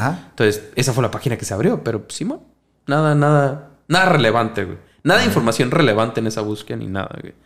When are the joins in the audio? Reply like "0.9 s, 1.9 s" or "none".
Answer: none